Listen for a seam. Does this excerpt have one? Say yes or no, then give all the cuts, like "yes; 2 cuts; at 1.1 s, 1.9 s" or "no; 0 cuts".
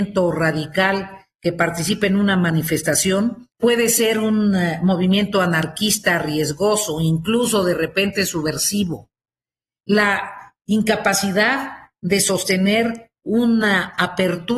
no; 0 cuts